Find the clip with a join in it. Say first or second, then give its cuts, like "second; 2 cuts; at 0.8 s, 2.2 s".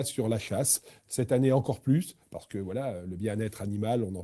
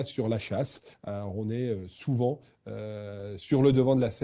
second; 1 cut; at 0.9 s